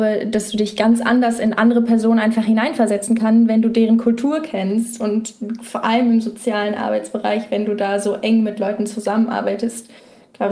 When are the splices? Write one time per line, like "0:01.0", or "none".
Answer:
none

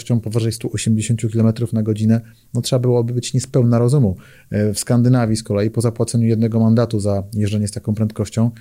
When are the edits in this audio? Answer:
none

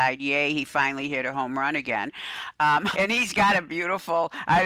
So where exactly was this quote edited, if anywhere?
0:02.9

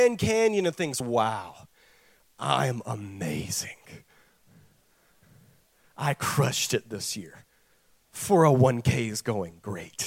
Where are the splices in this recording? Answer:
none

